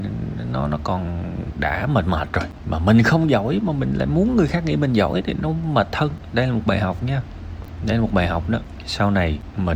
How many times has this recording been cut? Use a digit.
0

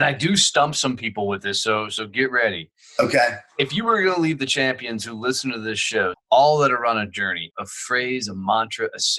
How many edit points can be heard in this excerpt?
2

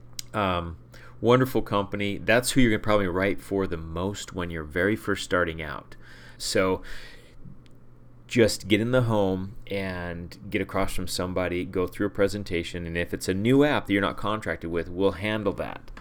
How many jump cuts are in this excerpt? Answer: 1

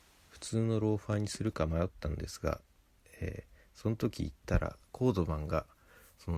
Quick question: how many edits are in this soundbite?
0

